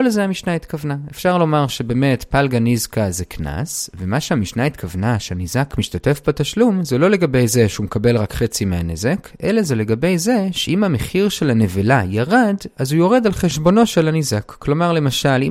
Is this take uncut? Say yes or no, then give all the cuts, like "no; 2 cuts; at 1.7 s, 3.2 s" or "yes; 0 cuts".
yes; 0 cuts